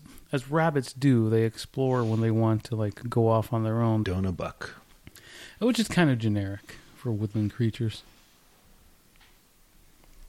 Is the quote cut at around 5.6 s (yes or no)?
no